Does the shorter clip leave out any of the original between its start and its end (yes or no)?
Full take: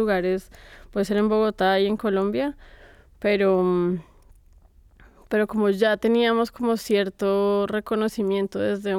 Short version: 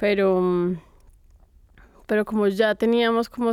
no